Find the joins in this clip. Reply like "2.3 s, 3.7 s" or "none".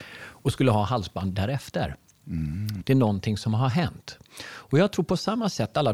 2.8 s